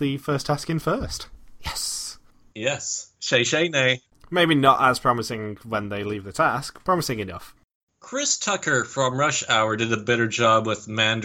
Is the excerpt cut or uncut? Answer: cut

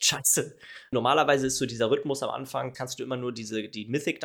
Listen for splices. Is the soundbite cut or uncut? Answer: cut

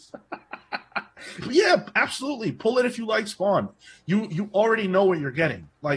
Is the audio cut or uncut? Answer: cut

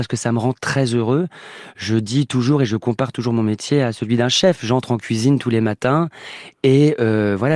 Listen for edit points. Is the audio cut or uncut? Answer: uncut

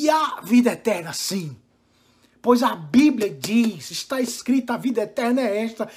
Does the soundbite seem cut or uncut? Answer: uncut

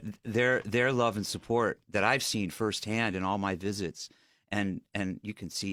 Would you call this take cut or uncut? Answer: uncut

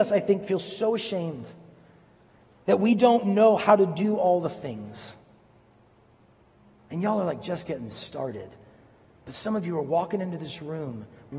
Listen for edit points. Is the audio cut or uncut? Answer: uncut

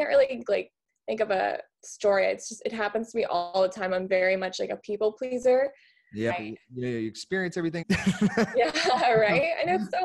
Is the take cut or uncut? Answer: cut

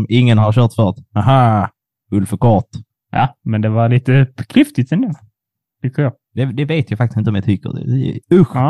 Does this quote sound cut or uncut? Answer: uncut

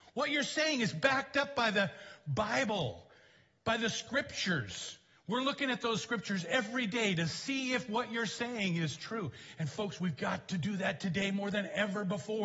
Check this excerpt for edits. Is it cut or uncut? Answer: uncut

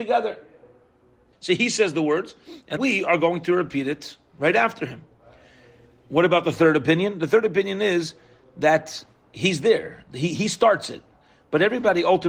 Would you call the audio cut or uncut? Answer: cut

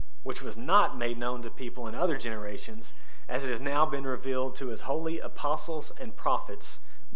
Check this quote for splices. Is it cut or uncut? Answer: uncut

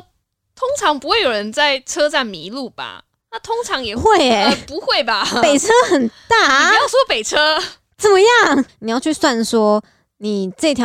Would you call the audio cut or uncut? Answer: cut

